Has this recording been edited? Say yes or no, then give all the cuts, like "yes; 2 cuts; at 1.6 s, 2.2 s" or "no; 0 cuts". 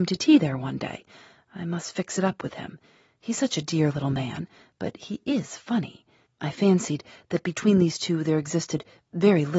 yes; 1 cut; at 6.3 s